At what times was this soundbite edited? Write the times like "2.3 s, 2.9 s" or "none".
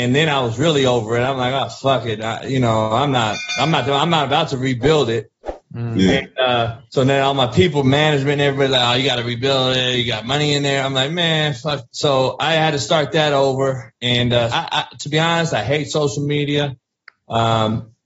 6.9 s, 14.5 s